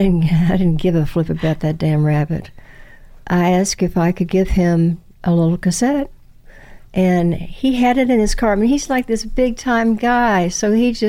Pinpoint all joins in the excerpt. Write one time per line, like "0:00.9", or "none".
0:03.2